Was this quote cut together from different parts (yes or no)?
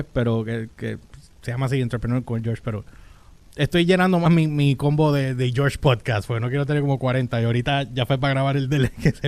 no